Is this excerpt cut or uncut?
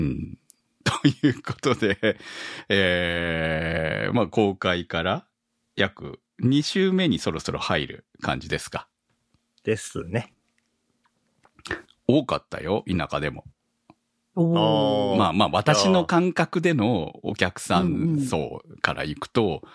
uncut